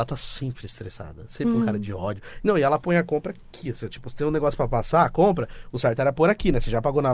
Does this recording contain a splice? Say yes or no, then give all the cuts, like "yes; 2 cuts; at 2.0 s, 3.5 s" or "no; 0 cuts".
no; 0 cuts